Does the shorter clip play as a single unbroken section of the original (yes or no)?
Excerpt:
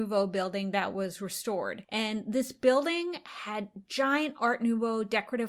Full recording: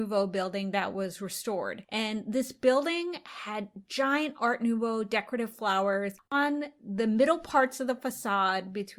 yes